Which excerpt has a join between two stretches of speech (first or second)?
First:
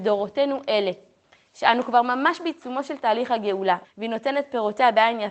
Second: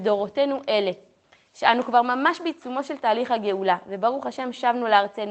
first